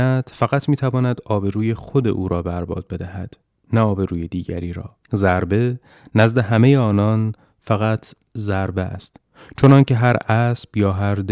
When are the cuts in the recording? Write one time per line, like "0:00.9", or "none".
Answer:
0:05.0